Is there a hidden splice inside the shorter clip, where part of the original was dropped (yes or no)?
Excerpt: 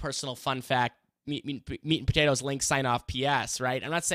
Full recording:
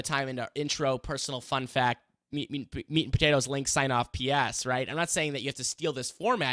no